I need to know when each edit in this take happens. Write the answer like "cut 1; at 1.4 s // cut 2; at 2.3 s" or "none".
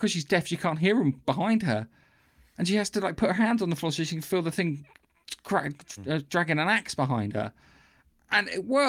none